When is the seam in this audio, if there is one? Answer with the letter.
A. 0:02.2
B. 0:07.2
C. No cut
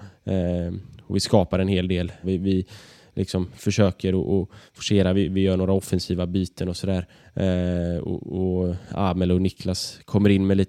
A